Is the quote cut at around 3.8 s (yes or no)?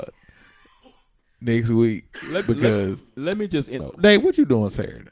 yes